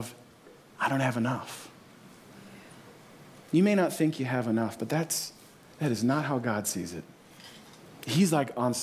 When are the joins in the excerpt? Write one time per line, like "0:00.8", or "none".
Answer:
none